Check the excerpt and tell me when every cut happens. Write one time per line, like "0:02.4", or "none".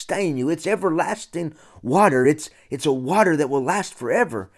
none